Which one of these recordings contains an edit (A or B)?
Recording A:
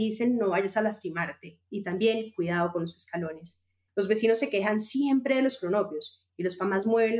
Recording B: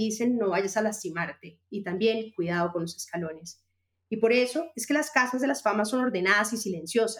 A